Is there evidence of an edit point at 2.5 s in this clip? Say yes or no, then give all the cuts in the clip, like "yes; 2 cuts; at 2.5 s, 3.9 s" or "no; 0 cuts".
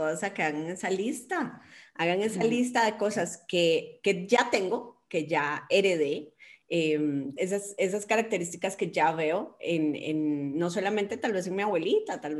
no; 1 cut; at 7.4 s